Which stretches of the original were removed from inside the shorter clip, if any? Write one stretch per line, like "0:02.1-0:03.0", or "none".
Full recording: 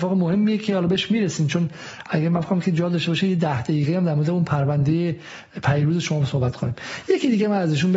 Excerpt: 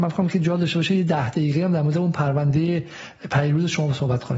none